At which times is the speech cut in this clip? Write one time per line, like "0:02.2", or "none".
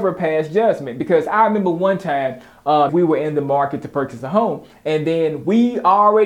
0:02.9

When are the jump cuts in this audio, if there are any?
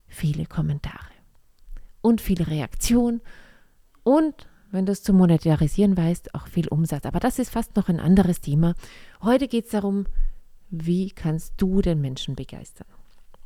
none

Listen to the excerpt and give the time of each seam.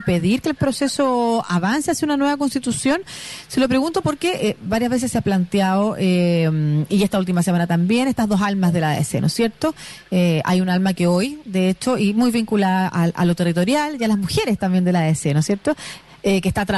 none

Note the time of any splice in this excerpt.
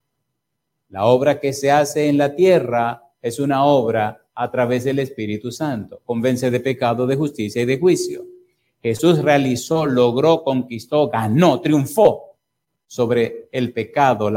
none

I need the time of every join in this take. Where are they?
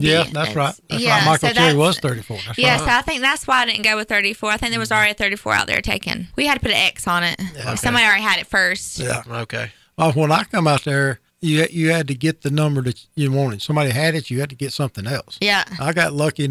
0:06.3
0:11.3

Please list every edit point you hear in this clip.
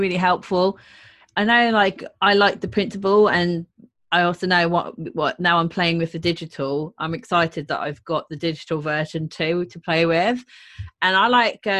none

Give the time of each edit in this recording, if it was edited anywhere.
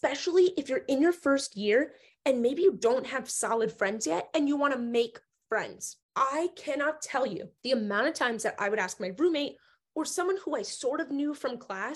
0:06.0
0:07.6

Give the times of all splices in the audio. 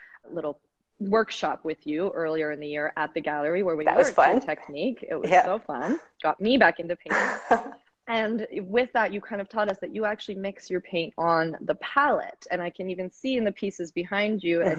none

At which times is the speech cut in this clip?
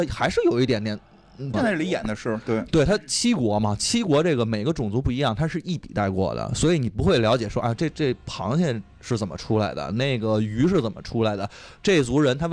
0:01.5

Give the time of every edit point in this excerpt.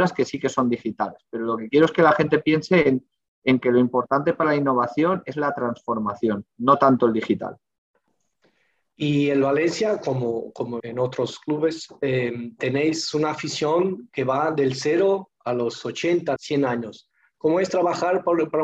0:10.8
0:16.4

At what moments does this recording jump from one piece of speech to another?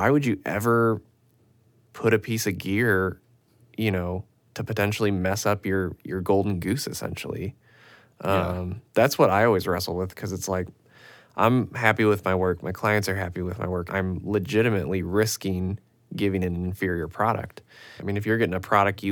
0:13.9
0:18.0

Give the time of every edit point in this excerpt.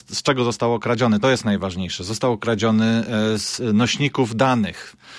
none

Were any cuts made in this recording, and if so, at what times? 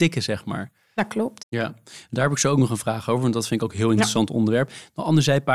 0:01.4

